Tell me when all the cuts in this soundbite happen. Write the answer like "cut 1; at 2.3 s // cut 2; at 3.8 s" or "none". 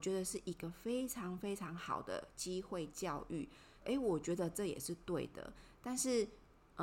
cut 1; at 3.8 s